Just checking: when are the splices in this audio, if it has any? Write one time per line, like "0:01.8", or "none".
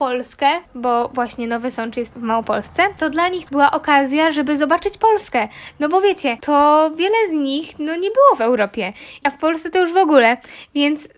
0:06.4
0:09.2